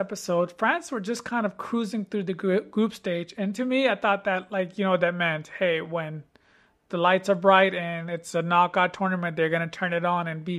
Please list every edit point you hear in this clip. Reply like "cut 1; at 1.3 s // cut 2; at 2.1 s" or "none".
none